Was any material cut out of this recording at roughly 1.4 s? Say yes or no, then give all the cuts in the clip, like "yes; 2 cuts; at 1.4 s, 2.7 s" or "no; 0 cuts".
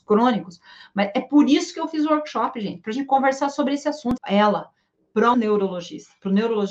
no; 2 cuts; at 4.2 s, 5.3 s